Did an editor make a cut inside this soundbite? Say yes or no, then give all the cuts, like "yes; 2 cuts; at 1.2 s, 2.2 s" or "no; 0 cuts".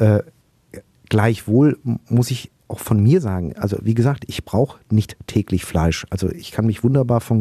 yes; 1 cut; at 2.6 s